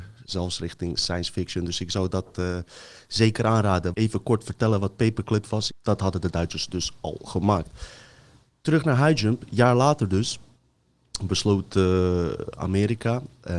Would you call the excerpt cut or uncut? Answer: cut